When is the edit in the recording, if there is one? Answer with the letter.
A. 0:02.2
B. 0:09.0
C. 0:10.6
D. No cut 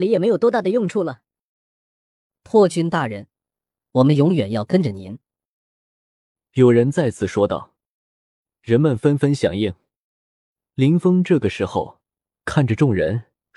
D